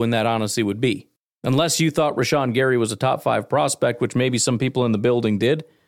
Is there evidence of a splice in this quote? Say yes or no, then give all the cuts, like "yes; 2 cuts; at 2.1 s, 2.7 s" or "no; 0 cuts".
no; 0 cuts